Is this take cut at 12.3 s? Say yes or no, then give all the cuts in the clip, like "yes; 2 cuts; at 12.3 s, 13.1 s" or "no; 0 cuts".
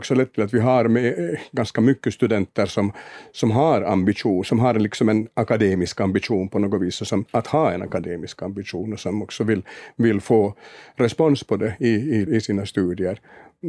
yes; 2 cuts; at 7.3 s, 12.3 s